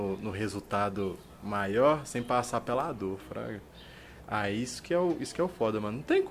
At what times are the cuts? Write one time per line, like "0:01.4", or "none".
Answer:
none